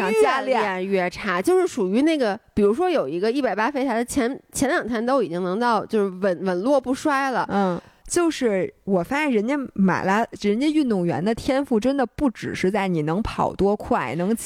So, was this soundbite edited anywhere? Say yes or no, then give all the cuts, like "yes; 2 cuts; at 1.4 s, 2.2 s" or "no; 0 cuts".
yes; 1 cut; at 8.0 s